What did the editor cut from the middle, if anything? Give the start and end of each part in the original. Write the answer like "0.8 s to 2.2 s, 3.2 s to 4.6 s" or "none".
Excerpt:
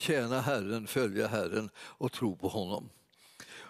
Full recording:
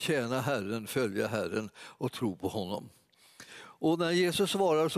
none